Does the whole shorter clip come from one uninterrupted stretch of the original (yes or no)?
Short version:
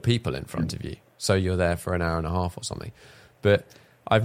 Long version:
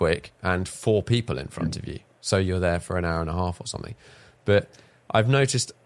yes